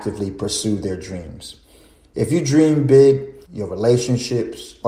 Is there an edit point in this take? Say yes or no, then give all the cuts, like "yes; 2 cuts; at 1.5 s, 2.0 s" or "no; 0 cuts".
yes; 1 cut; at 3.4 s